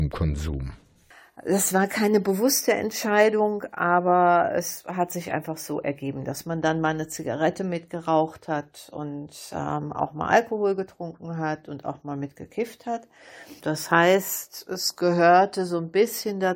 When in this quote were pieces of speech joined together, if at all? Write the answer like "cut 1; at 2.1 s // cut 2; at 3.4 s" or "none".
cut 1; at 13.6 s